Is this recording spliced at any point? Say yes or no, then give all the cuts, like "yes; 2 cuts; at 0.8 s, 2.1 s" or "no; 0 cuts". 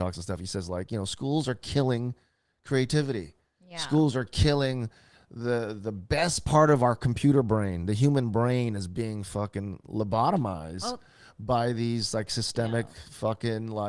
no; 0 cuts